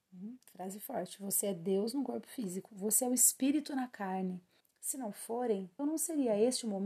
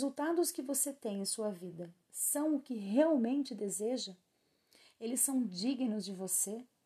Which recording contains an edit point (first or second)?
first